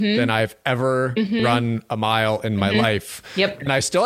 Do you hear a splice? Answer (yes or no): no